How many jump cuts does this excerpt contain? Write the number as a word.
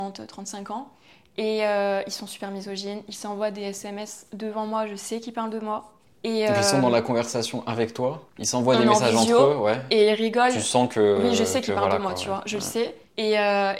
zero